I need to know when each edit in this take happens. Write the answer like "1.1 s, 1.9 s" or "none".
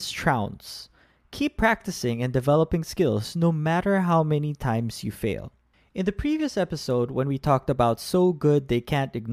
none